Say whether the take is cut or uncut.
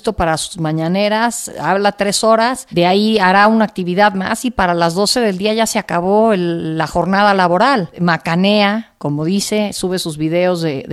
uncut